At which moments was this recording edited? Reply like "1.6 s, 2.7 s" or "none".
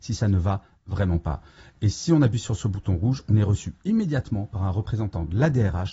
none